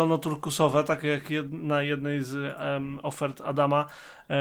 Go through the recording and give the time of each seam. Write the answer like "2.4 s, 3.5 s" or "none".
none